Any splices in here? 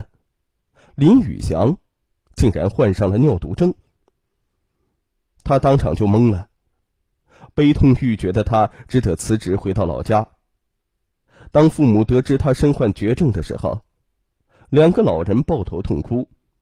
no; 0 cuts

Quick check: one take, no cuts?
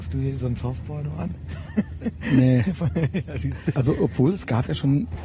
no; 1 cut; at 3.7 s

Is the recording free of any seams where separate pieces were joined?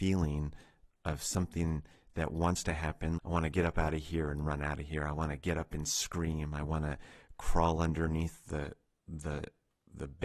no; 1 cut; at 3.2 s

